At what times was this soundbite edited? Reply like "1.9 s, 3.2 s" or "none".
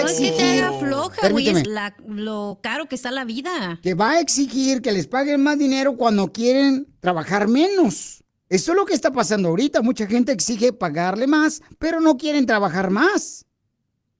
1.6 s